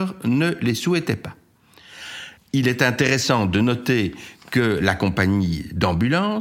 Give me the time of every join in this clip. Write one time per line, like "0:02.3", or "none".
0:02.4